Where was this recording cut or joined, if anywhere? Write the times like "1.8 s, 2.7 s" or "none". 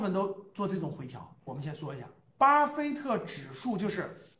1.5 s